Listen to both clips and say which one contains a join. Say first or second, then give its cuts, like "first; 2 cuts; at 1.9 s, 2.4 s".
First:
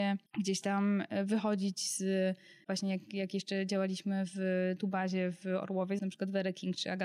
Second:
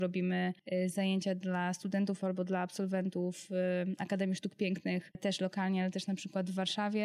first; 2 cuts; at 2.6 s, 6.0 s